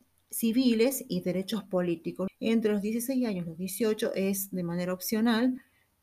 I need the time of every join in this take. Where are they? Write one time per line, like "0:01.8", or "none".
0:02.3